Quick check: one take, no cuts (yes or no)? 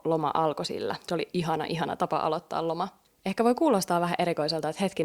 yes